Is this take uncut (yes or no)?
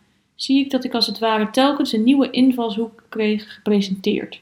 yes